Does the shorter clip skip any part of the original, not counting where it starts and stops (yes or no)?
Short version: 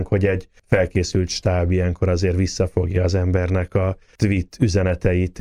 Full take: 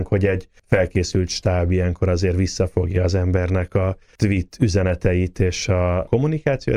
no